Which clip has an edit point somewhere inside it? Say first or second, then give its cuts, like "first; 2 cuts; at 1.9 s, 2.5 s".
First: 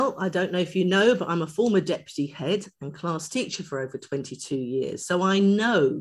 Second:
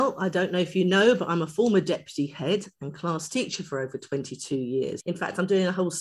second; 1 cut; at 5.0 s